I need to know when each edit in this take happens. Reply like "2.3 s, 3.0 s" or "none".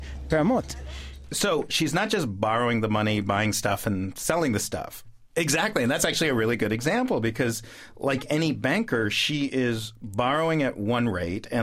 1.7 s, 5.0 s